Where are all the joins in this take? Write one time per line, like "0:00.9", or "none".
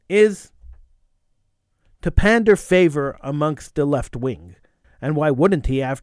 0:04.8